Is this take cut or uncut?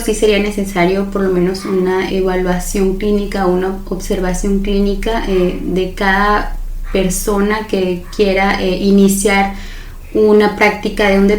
cut